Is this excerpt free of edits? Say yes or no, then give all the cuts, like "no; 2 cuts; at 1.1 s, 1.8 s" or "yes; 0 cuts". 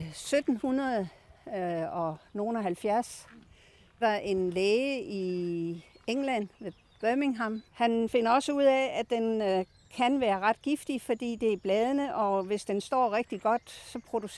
no; 2 cuts; at 4.0 s, 7.7 s